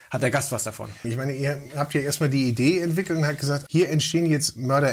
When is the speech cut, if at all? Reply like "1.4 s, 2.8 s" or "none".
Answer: 1.0 s, 3.7 s